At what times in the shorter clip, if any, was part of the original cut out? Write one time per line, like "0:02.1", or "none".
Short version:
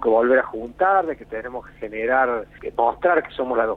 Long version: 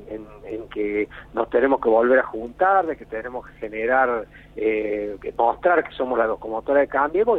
0:02.6